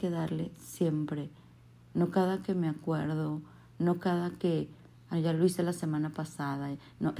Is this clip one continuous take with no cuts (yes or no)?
no